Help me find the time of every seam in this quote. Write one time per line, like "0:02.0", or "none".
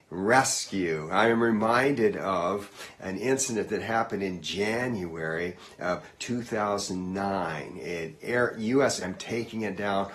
0:09.0